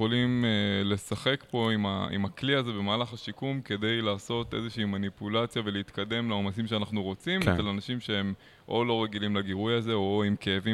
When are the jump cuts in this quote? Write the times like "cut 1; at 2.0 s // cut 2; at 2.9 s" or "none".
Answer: none